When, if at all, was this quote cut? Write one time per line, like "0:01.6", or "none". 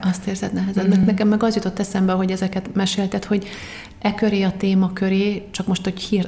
none